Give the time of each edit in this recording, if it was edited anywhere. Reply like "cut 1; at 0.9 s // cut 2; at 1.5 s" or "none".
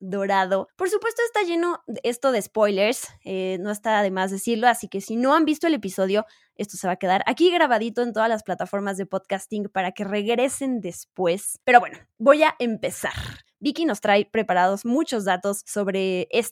cut 1; at 13.5 s

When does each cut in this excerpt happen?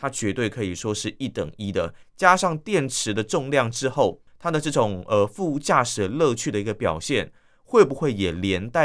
cut 1; at 2.0 s // cut 2; at 4.3 s

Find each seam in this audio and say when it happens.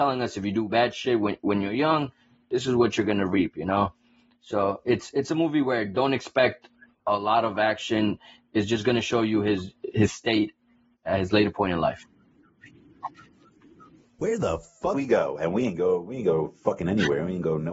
cut 1; at 9.9 s

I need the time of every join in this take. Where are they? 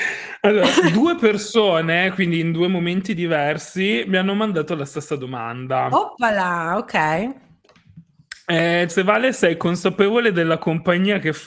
cut 1; at 8.9 s

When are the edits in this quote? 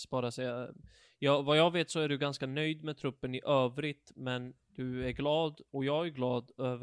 none

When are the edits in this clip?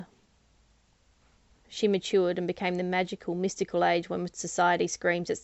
cut 1; at 1.6 s

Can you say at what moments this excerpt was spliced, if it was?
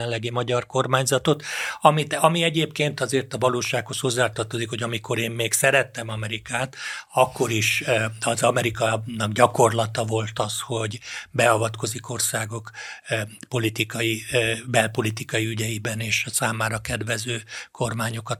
none

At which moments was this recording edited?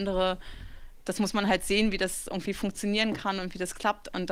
none

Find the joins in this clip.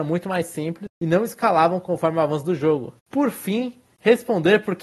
cut 1; at 3.0 s

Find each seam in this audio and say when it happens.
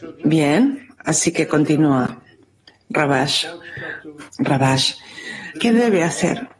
cut 1; at 4.3 s // cut 2; at 5.5 s

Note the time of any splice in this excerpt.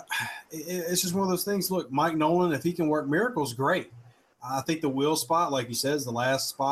none

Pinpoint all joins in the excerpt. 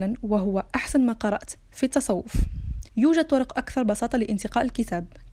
cut 1; at 2.9 s

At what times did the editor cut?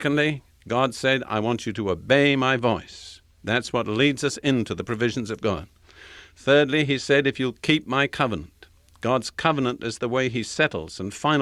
none

